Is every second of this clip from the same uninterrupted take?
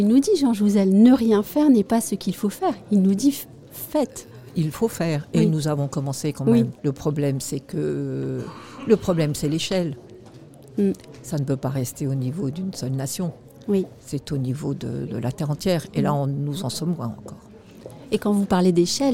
no; 2 cuts; at 6.8 s, 15.1 s

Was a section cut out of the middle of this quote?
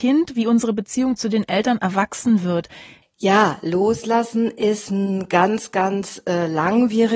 yes; 1 cut; at 3.0 s

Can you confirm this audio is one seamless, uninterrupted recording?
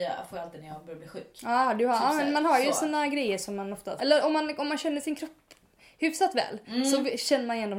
no; 1 cut; at 4.0 s

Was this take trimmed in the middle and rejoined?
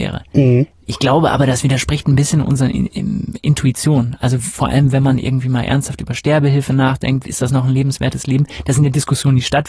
yes; 1 cut; at 7.2 s

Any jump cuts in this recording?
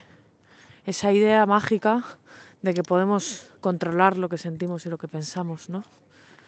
yes; 1 cut; at 3.6 s

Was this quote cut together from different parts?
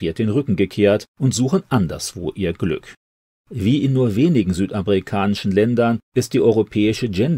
no; 0 cuts

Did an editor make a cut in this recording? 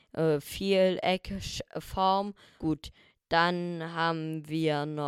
yes; 1 cut; at 2.6 s

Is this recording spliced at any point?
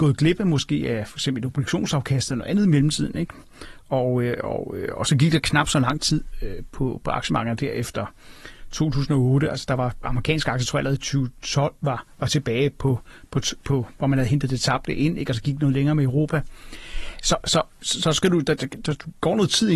no; 0 cuts

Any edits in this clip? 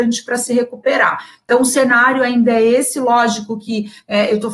no; 0 cuts

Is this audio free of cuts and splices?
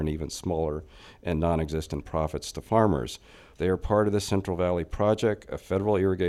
no; 1 cut; at 3.5 s

